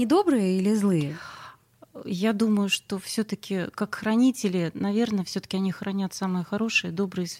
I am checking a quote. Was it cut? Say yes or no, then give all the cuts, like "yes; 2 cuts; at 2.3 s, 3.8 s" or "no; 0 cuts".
no; 0 cuts